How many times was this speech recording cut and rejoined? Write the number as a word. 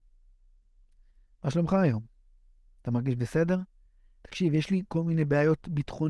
zero